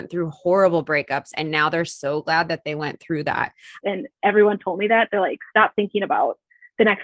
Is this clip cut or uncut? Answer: cut